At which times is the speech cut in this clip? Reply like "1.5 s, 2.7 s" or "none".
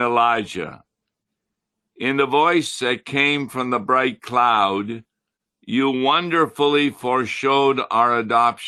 none